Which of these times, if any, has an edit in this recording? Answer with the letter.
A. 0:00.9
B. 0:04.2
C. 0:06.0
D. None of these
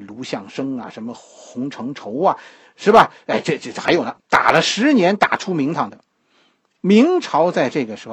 B